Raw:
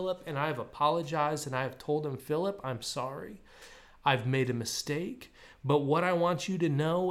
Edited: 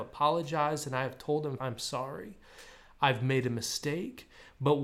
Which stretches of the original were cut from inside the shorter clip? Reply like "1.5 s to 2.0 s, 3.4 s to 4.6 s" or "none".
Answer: 2.2 s to 2.6 s